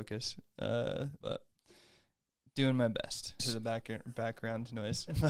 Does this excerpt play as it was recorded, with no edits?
no; 2 cuts; at 1.2 s, 3.4 s

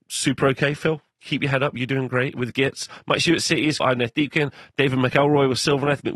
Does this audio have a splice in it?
yes; 1 cut; at 3.8 s

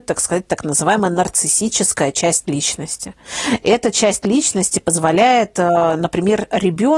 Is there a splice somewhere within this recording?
no; 0 cuts

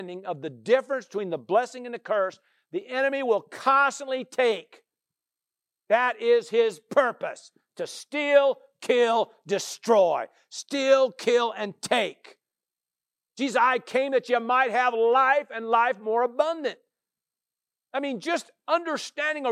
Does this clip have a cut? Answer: no; 0 cuts

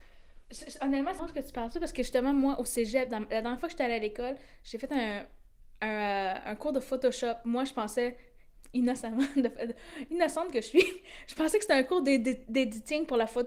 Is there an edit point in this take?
yes; 1 cut; at 1.2 s

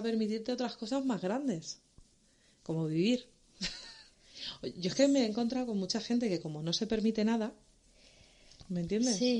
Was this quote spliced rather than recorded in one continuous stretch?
no; 0 cuts

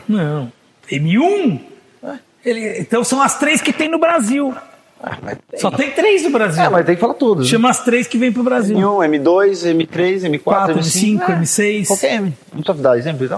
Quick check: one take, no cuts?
yes; 0 cuts

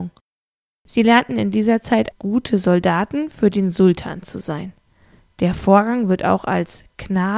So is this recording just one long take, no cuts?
no; 1 cut; at 2.1 s

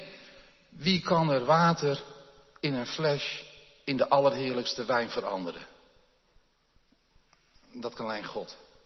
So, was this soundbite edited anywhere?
no; 0 cuts

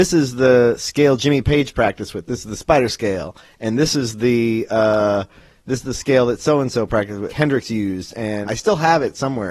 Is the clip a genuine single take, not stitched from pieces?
no; 2 cuts; at 7.3 s, 8.5 s

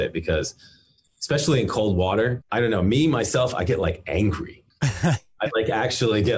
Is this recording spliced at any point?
yes; 1 cut; at 2.4 s

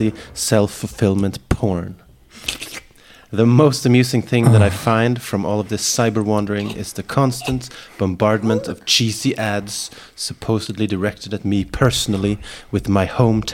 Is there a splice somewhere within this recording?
no; 0 cuts

